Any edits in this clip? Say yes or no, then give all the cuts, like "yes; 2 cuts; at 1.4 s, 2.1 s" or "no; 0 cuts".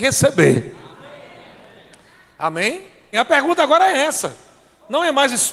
yes; 1 cut; at 3.1 s